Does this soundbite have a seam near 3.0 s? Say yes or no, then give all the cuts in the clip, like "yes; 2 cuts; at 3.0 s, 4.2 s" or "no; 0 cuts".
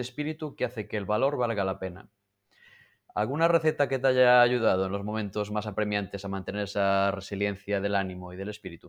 no; 0 cuts